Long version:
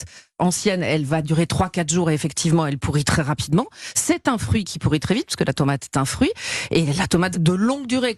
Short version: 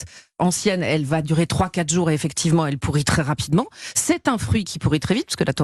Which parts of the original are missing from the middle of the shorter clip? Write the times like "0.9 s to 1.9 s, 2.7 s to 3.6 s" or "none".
none